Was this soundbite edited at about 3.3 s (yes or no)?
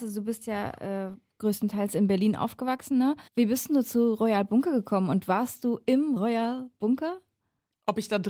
yes